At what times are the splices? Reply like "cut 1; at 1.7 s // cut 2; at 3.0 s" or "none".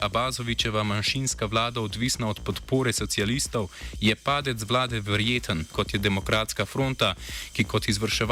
cut 1; at 5.7 s